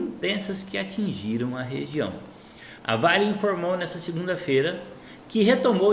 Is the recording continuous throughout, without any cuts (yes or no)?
no